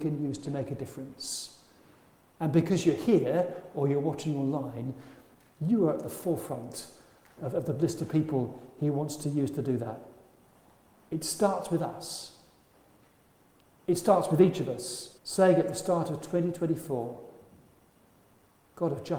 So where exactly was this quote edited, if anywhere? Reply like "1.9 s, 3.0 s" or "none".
15.2 s